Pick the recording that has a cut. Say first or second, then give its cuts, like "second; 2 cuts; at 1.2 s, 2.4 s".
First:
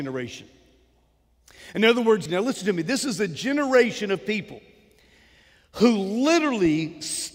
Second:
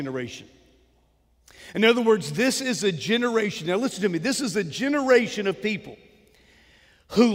first; 1 cut; at 2.3 s